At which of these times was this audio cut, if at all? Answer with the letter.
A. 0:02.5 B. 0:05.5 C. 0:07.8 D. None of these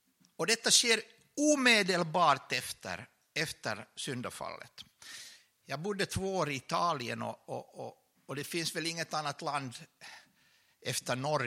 D